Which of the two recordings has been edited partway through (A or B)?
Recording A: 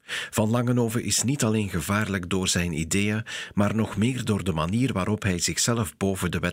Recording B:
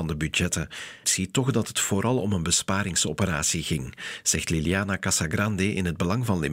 B